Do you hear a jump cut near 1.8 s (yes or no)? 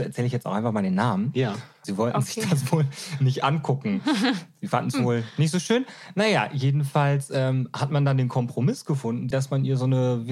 yes